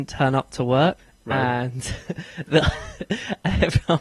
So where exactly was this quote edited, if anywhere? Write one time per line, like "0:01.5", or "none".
none